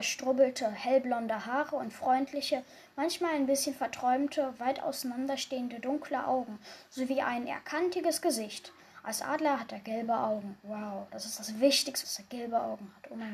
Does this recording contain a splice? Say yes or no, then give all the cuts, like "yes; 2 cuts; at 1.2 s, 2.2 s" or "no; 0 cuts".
yes; 2 cuts; at 10.6 s, 12.0 s